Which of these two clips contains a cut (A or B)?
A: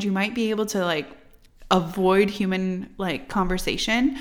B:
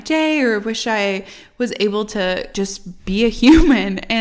B